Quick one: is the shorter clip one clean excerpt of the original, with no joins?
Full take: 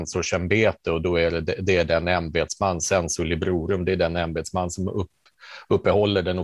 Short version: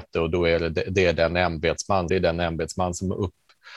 no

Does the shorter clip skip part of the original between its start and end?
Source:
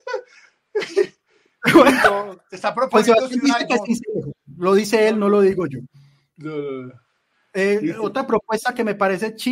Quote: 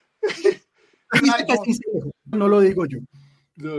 yes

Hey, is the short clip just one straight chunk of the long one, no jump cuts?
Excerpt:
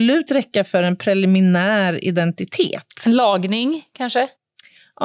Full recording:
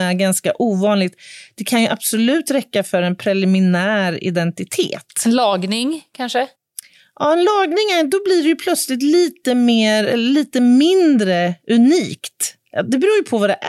yes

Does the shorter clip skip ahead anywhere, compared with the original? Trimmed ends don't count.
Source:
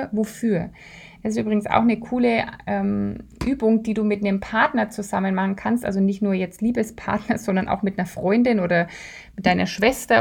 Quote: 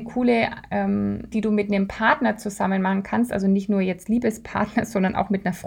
yes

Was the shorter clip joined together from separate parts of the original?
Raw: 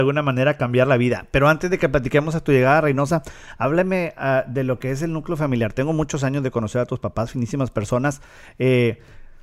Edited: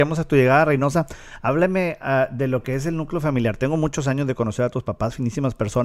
no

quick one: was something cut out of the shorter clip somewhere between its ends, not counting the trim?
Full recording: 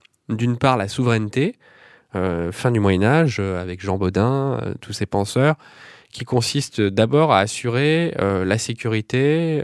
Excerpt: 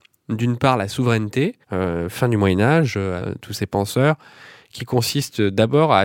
yes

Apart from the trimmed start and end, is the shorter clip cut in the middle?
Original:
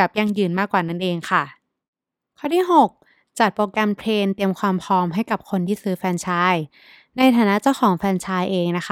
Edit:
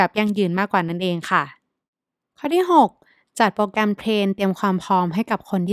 no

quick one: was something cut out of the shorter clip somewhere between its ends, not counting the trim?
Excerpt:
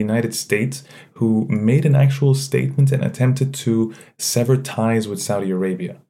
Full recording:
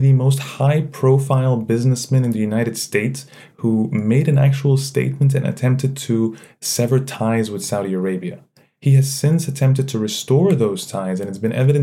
no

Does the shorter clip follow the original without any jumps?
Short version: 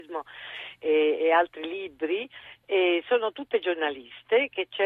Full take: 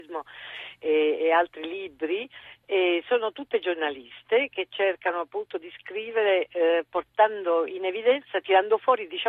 yes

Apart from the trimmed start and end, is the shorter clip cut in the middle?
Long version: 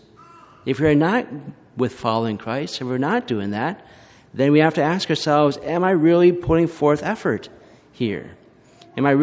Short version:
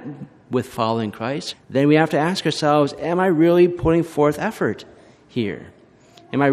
yes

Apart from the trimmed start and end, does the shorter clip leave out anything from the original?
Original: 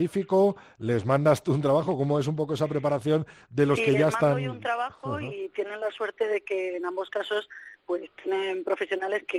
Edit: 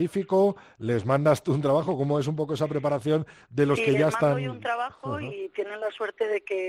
no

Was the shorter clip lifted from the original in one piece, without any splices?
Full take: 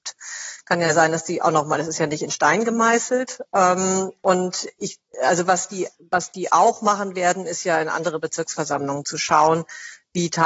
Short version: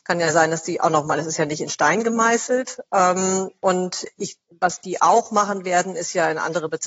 no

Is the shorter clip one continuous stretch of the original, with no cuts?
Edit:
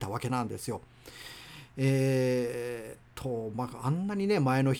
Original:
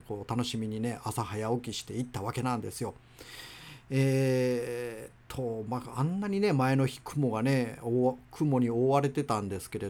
yes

